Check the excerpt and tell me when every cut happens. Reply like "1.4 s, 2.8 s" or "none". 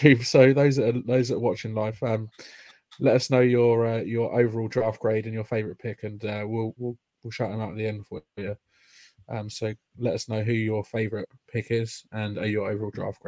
none

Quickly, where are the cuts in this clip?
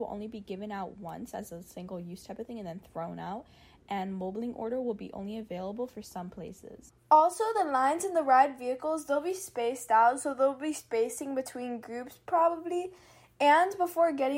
none

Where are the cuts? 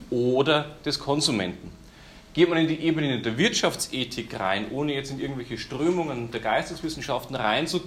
none

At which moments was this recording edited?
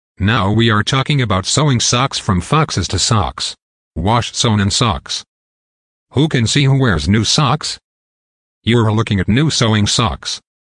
3.8 s

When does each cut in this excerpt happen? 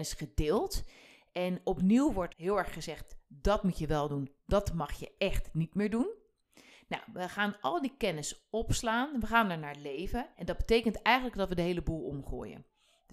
2.3 s, 10.3 s

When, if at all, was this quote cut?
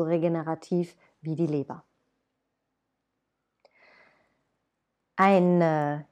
none

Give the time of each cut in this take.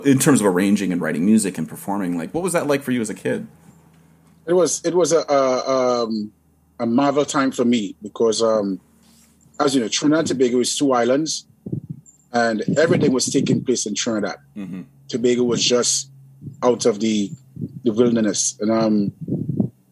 none

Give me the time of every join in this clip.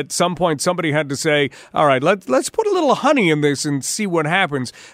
none

